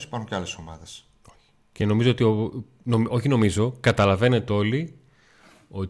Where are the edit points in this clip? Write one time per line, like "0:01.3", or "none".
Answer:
none